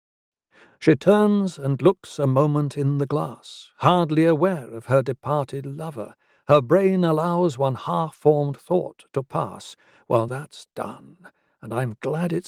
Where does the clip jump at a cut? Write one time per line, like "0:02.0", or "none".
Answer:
0:10.3